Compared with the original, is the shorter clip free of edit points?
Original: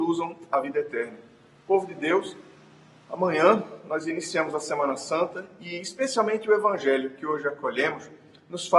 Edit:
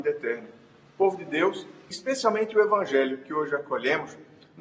no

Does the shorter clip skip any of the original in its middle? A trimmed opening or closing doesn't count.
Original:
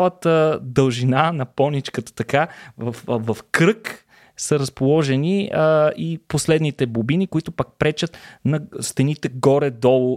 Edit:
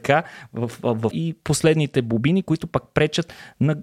yes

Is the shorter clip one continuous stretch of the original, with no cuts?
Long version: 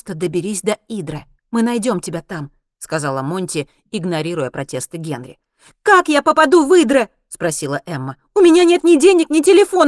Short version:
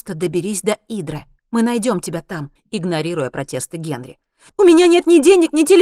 no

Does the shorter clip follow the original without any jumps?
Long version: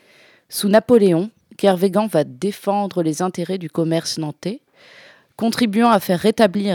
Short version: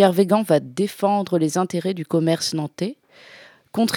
yes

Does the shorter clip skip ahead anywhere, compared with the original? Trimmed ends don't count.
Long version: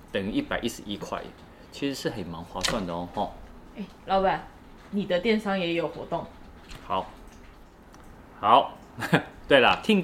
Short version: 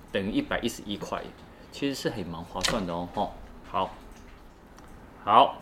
yes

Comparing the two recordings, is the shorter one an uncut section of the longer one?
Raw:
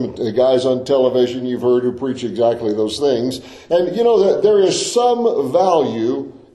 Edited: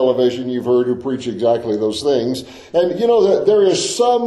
yes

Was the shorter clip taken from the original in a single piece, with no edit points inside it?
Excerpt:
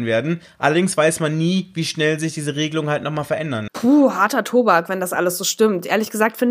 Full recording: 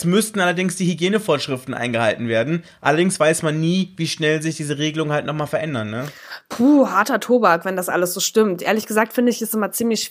no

